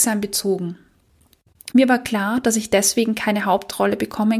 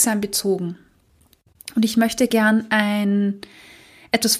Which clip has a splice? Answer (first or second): first